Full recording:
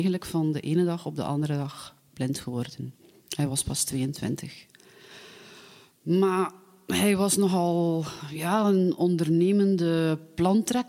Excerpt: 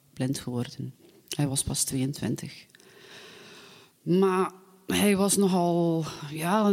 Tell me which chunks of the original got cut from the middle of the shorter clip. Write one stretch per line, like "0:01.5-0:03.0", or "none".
none